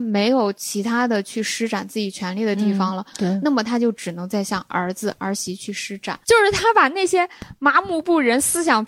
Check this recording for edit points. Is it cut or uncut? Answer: cut